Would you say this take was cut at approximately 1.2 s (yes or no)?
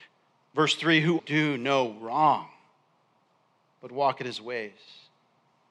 yes